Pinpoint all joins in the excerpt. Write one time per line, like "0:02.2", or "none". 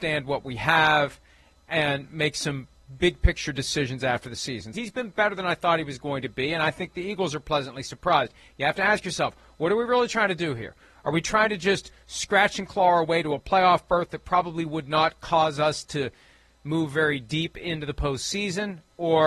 0:04.7